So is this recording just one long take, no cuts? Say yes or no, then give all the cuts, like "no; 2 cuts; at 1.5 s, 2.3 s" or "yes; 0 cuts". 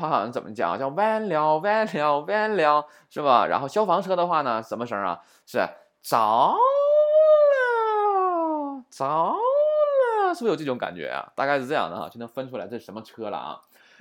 yes; 0 cuts